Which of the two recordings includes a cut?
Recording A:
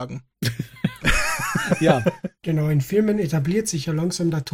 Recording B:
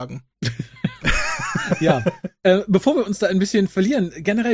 A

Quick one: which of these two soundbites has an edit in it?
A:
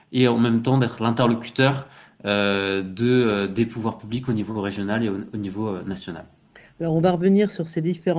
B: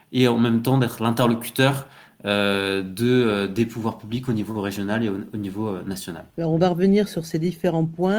B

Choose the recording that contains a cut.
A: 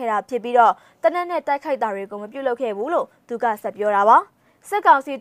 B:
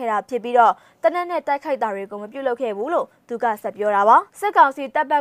B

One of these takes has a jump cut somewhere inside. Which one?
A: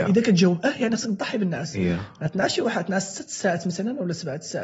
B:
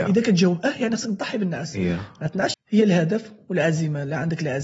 B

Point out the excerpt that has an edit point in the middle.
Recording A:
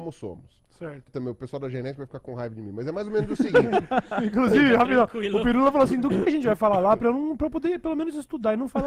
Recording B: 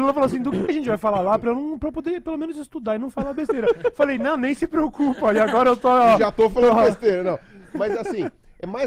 A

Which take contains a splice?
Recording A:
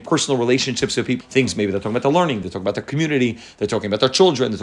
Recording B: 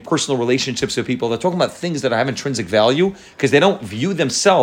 A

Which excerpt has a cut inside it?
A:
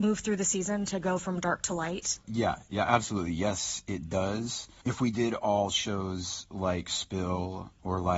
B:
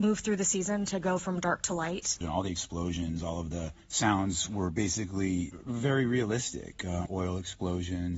B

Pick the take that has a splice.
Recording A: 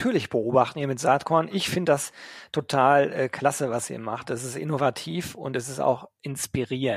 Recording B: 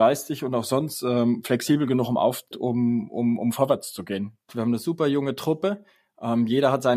B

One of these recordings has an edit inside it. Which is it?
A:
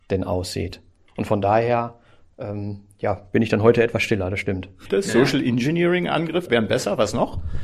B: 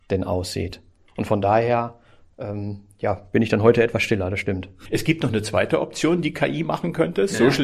A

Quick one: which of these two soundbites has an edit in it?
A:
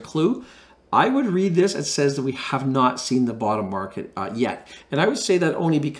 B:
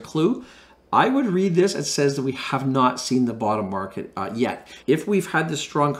B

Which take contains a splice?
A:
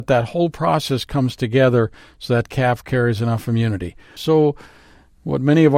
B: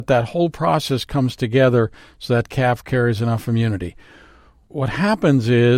A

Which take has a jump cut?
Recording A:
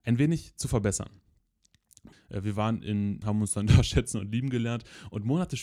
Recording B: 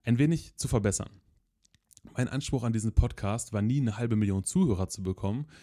A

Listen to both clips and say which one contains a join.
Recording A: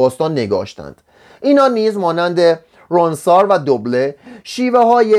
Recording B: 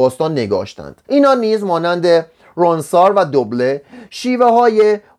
B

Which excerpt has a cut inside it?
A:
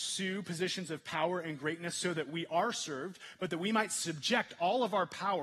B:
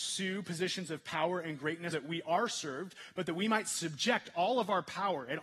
B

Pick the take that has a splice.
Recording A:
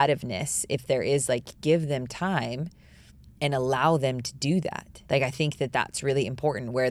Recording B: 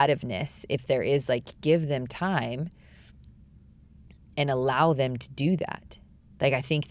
A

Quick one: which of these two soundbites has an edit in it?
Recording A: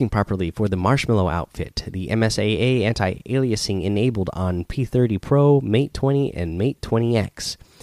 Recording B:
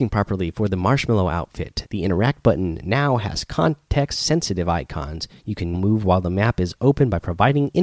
B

